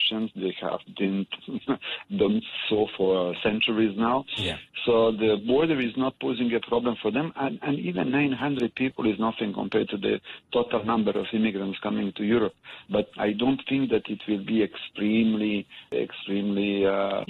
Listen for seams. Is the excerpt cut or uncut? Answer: cut